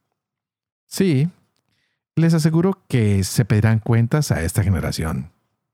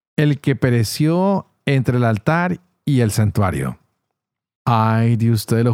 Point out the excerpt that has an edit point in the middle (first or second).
second